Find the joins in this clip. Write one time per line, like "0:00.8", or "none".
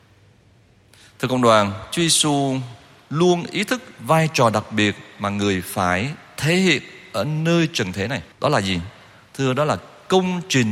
0:08.3